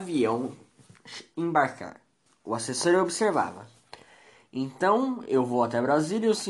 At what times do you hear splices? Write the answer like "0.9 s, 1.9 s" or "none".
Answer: none